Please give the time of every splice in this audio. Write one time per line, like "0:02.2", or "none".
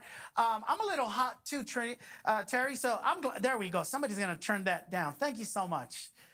none